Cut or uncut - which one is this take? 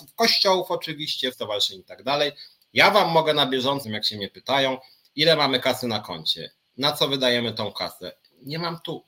cut